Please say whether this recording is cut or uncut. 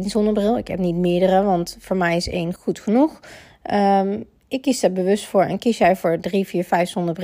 cut